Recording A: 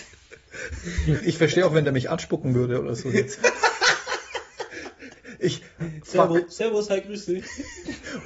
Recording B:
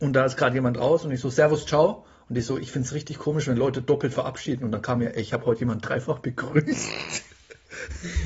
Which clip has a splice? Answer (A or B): A